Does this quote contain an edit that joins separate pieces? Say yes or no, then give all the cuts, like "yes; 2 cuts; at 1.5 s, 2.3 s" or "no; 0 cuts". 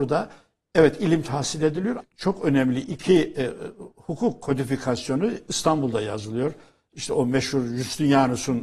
yes; 1 cut; at 2.0 s